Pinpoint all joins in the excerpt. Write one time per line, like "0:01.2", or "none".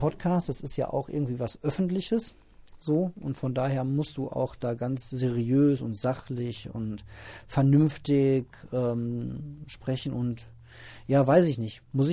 none